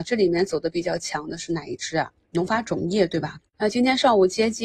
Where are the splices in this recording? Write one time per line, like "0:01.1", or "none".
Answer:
0:02.2
0:03.4